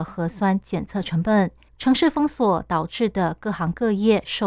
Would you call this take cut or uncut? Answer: cut